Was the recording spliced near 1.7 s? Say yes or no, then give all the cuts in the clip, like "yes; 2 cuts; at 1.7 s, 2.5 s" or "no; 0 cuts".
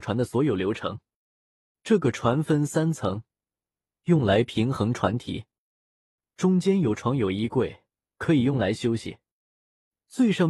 no; 2 cuts; at 3.9 s, 8.1 s